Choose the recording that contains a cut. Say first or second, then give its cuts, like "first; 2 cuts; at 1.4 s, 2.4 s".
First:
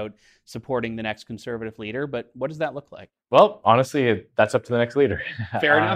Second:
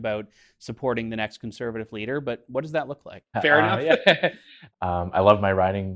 second; 2 cuts; at 3.3 s, 4.7 s